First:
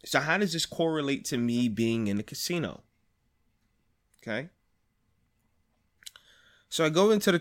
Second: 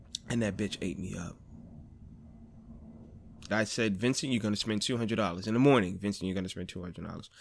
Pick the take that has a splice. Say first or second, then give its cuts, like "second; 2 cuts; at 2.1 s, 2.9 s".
second; 1 cut; at 3.5 s